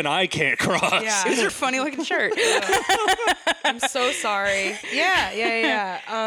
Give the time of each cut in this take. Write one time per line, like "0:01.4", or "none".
0:01.5
0:04.8

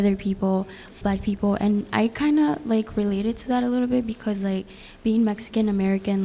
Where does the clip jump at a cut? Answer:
0:01.0

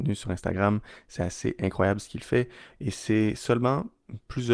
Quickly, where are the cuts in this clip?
0:02.7

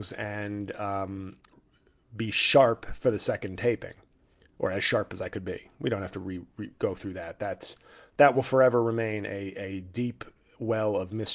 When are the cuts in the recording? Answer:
none

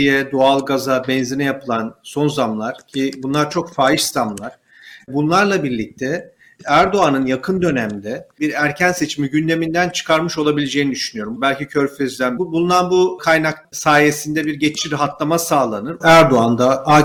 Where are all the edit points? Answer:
0:11.4
0:12.4
0:16.0

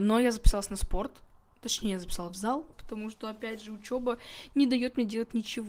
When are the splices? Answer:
0:02.7

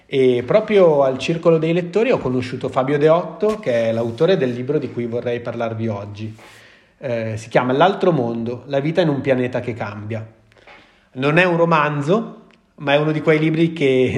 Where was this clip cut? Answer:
none

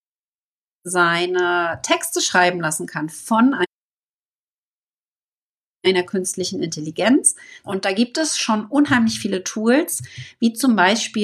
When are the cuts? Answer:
0:07.6

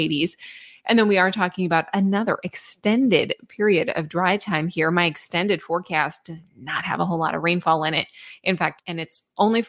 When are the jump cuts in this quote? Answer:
0:08.8

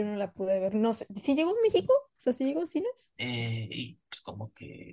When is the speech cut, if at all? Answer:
0:03.1

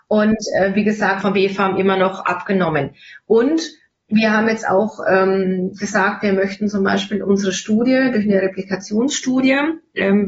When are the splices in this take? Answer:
0:01.2

